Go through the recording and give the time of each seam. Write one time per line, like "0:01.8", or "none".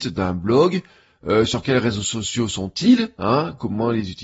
none